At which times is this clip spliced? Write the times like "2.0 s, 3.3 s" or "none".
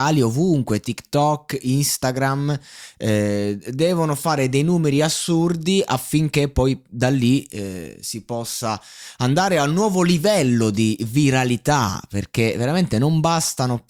none